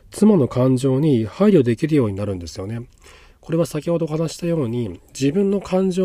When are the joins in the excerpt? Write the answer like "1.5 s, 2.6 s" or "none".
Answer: none